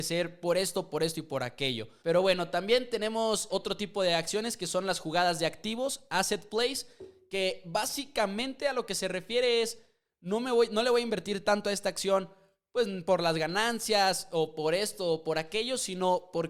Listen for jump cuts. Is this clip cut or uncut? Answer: cut